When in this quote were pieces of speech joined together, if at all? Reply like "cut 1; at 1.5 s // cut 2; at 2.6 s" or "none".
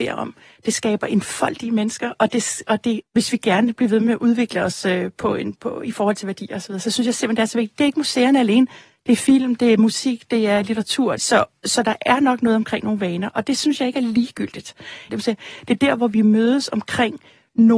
cut 1; at 3.0 s // cut 2; at 11.2 s // cut 3; at 15.1 s